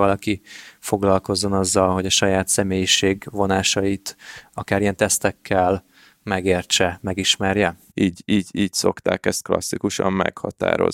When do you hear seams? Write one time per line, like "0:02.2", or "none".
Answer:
0:07.9